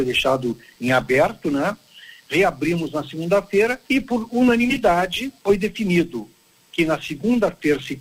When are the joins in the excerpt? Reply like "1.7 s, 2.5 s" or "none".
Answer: 3.8 s, 5.4 s